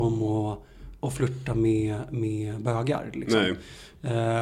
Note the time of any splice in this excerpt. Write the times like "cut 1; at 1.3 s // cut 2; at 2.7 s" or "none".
none